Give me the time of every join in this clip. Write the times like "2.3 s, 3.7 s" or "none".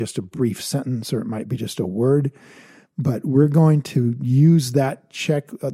none